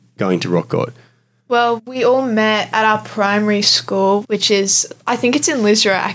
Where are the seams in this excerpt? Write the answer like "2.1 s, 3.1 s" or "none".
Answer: 1.8 s, 4.2 s